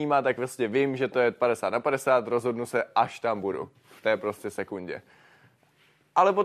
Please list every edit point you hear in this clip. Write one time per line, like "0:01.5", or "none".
none